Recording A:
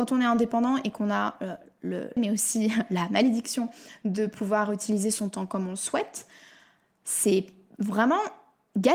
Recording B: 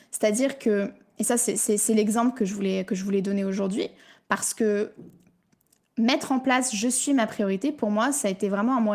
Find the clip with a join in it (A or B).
A